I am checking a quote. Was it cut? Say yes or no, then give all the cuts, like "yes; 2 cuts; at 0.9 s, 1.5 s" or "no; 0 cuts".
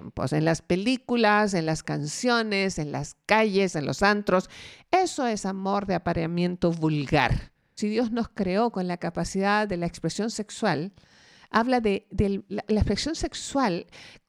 yes; 3 cuts; at 3.7 s, 7.8 s, 12.7 s